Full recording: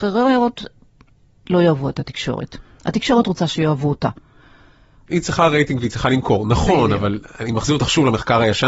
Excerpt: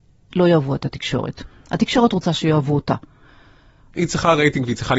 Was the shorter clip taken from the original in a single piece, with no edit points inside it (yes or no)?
yes